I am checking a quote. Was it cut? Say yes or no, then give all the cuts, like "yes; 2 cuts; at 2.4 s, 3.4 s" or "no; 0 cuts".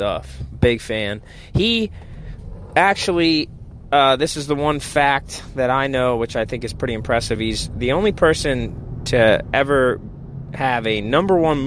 no; 0 cuts